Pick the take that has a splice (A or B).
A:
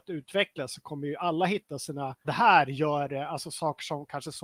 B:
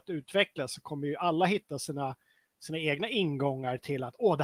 A